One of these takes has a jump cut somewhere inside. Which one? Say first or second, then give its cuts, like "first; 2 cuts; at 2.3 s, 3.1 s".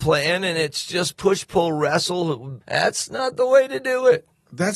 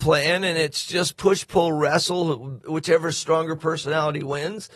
first; 1 cut; at 2.6 s